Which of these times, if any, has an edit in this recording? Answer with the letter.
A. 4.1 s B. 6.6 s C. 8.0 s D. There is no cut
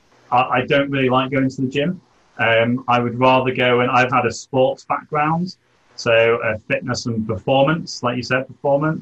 A